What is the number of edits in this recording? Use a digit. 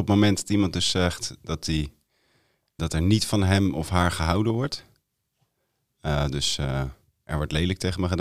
1